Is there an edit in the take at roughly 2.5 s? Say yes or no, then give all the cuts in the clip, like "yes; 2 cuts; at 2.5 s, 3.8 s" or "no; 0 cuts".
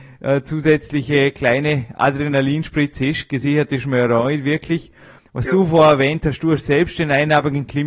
no; 1 cut; at 5.2 s